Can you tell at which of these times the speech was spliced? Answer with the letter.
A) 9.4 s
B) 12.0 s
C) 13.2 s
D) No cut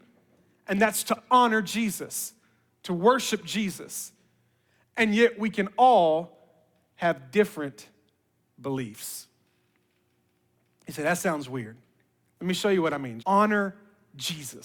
C